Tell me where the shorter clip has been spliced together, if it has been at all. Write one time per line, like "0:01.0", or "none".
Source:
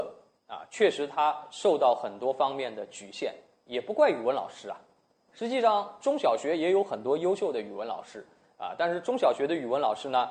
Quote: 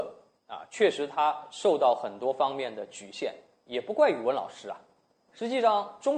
none